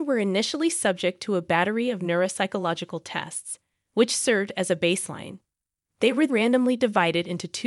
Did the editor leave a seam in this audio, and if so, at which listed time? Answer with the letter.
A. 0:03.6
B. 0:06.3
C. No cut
B